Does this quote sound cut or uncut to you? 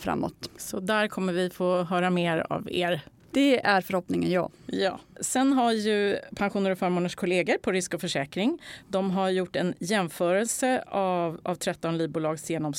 uncut